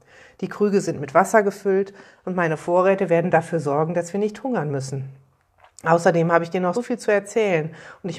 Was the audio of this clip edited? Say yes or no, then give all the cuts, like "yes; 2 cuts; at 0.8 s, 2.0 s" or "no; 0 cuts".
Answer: yes; 1 cut; at 6.7 s